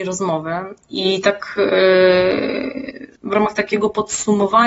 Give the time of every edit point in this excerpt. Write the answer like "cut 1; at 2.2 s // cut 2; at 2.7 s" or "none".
cut 1; at 3.2 s

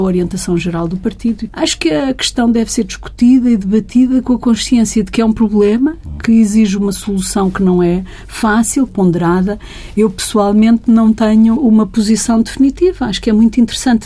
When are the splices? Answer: cut 1; at 1.5 s // cut 2; at 8.9 s // cut 3; at 11.6 s

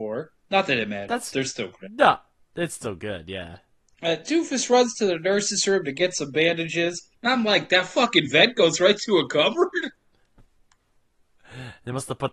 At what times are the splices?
cut 1; at 7.1 s

